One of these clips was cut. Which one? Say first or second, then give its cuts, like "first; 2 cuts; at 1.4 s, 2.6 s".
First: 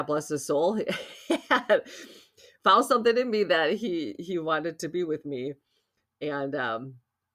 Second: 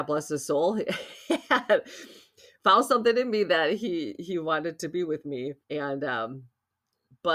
second; 1 cut; at 5.6 s